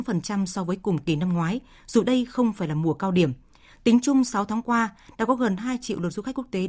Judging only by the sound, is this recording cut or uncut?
uncut